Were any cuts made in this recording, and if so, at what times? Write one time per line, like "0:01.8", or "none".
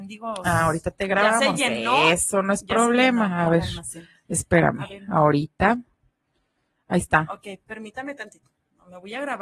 none

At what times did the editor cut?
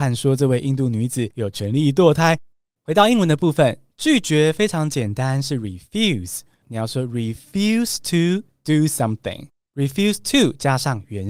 0:06.6

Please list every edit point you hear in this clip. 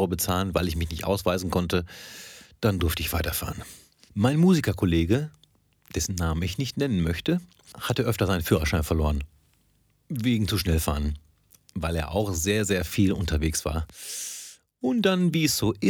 0:04.1

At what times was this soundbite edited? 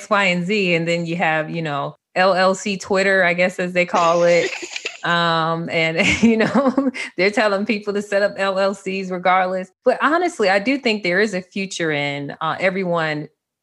none

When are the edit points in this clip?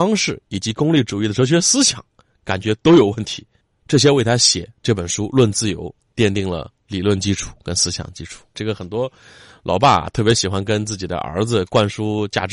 0:08.5

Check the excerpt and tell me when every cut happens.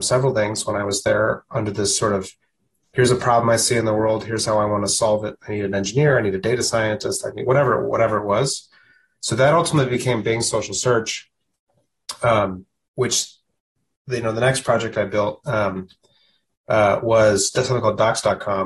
none

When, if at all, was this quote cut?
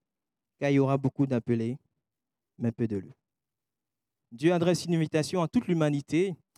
0:04.2

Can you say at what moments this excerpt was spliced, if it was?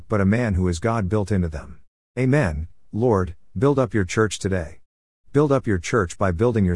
0:02.1

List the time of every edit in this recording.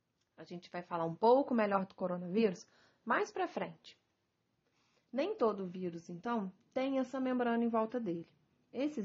none

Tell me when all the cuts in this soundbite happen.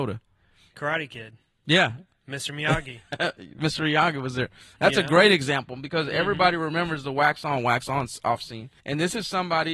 0:08.8

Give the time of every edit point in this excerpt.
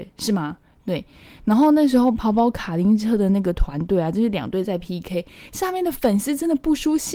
none

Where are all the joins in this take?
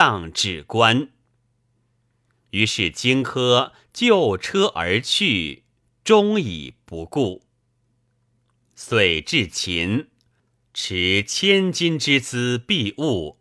none

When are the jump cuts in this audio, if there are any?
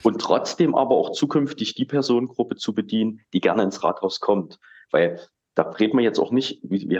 none

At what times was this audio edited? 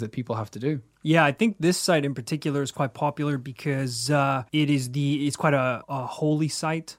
0:04.5

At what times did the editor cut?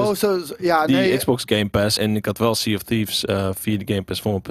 0:02.0

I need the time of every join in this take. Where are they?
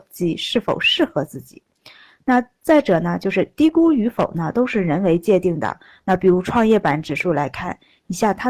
none

